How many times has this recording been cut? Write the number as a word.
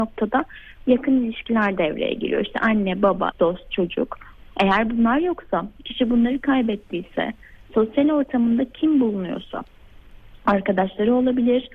one